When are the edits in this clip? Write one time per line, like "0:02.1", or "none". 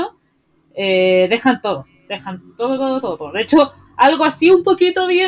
none